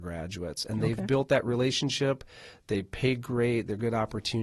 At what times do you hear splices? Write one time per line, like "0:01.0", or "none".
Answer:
none